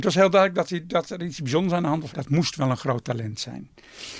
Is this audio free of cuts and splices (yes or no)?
no